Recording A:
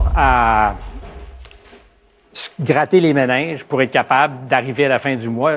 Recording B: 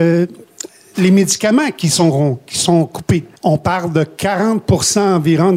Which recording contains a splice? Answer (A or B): B